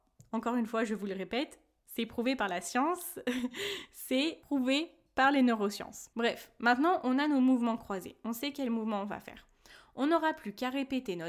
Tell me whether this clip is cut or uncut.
uncut